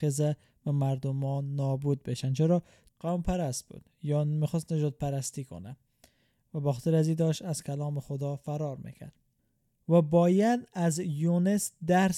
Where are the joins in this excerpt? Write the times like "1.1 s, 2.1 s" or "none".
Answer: 2.9 s